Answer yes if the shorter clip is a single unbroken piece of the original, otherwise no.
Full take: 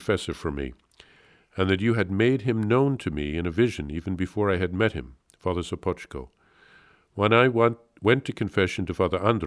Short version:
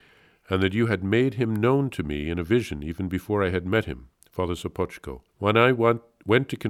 no